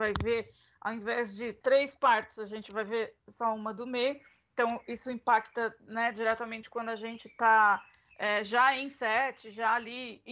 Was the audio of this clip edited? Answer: yes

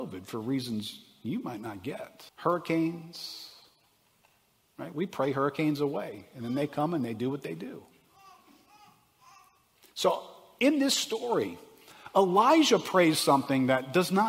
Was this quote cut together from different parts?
yes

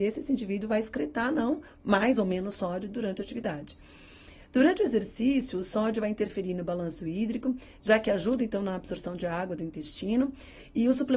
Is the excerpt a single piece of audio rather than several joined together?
yes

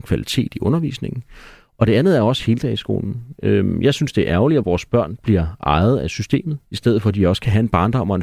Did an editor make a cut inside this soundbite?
no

